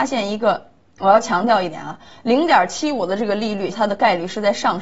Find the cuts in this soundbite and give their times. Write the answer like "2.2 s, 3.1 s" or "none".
3.7 s